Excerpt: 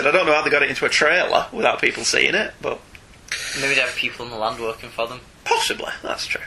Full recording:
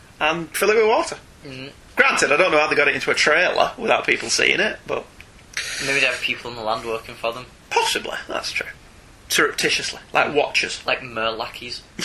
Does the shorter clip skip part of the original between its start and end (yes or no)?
no